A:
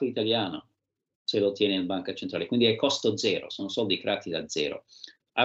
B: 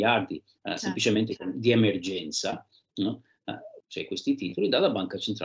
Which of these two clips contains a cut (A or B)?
B